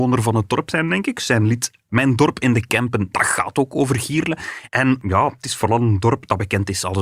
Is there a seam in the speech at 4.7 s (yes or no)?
yes